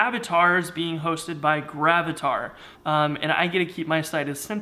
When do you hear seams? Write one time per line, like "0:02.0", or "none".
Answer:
0:02.7